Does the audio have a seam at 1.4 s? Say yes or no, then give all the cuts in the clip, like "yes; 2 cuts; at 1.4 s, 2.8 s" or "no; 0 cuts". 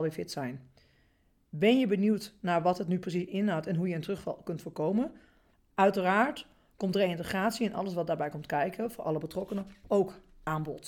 no; 1 cut; at 5.5 s